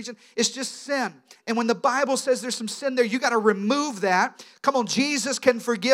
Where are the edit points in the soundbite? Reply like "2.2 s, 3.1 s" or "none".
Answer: 1.4 s